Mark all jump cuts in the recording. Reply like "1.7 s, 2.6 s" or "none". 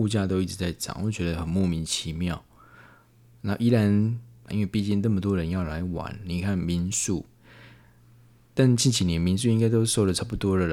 4.5 s